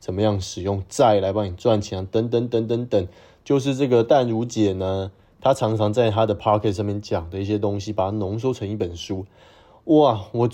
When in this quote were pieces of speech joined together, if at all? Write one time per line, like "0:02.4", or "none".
none